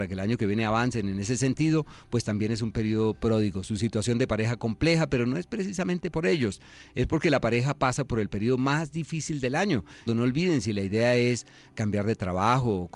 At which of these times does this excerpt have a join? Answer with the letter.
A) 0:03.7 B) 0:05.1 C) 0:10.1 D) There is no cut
C